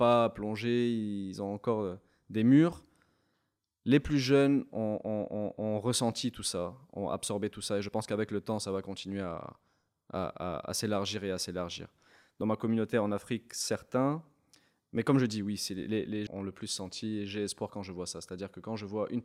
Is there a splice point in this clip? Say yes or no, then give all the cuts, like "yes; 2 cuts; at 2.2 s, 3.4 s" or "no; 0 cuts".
yes; 1 cut; at 16.3 s